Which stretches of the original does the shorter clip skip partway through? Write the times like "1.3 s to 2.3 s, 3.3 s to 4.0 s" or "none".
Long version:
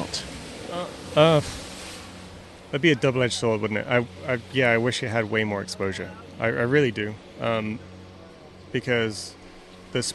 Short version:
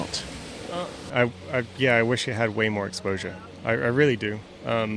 1.1 s to 3.8 s